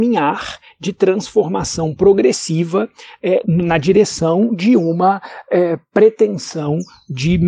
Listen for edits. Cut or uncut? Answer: cut